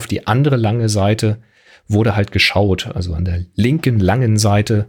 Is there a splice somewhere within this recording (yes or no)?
no